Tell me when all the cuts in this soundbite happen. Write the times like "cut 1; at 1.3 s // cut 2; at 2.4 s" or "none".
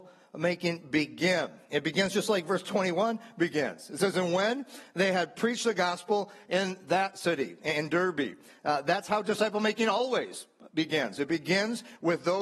none